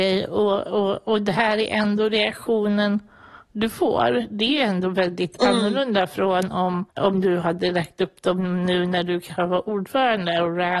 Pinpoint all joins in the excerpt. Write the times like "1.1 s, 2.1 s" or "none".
6.9 s